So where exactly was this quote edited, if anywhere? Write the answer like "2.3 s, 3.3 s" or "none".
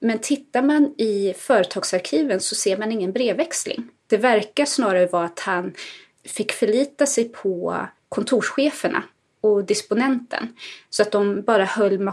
4.1 s, 6.1 s